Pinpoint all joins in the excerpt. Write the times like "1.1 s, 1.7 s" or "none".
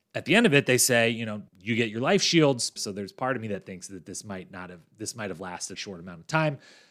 1.5 s, 2.8 s, 5.7 s